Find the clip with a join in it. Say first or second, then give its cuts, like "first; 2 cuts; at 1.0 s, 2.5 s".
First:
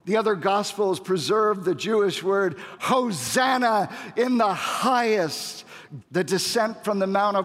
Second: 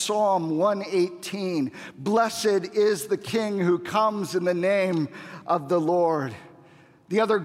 first; 2 cuts; at 2.8 s, 6.0 s